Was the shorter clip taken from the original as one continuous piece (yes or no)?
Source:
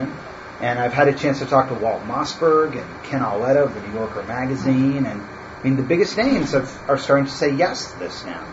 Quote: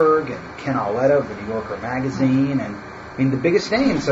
yes